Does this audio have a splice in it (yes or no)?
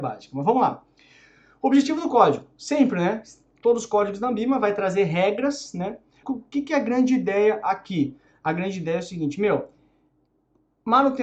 yes